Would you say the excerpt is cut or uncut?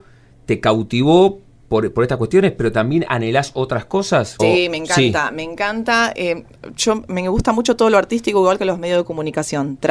cut